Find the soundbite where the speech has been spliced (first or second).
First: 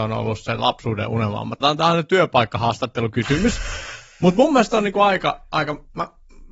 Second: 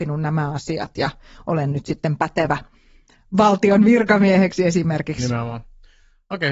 first